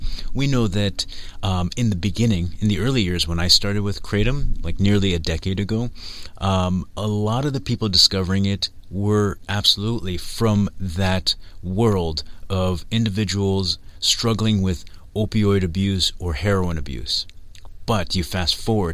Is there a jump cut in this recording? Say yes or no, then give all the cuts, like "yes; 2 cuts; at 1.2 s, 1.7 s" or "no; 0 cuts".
no; 0 cuts